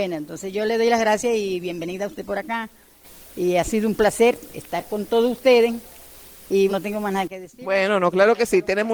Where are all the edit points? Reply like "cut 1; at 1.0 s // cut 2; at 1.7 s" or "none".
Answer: cut 1; at 6.7 s